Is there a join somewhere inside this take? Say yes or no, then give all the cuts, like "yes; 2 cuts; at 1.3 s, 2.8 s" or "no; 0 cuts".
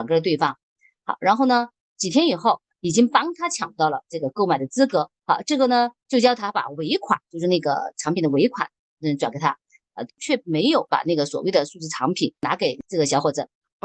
yes; 3 cuts; at 2.7 s, 5.2 s, 10.1 s